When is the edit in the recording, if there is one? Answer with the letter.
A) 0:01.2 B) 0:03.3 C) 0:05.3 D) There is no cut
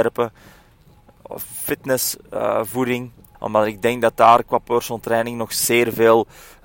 B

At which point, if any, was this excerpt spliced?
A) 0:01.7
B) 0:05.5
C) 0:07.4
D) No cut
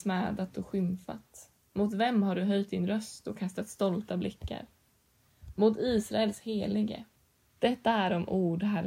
C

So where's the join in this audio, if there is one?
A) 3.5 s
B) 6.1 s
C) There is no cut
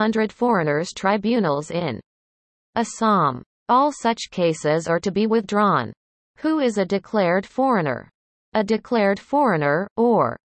C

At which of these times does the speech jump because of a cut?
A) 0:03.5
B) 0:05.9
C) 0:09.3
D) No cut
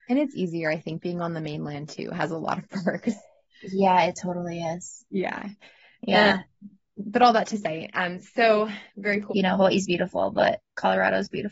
C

